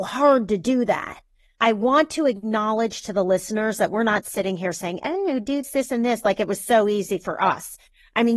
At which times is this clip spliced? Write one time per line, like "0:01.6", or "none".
0:05.6